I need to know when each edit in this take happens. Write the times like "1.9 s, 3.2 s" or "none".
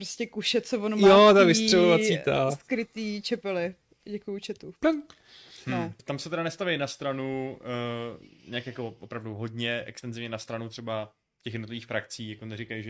6.0 s